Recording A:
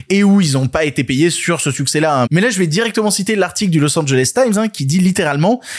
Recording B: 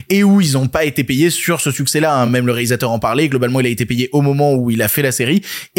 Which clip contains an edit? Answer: A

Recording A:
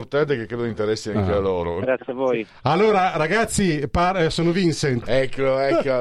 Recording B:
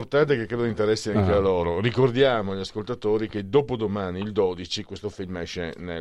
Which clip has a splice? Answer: A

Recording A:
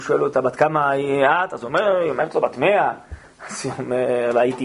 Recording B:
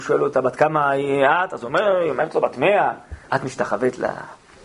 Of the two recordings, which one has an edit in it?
B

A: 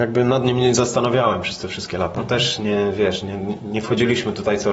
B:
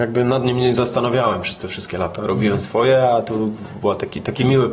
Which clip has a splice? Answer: A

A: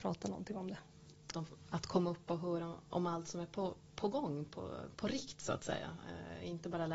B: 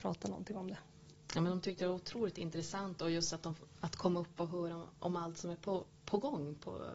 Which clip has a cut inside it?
A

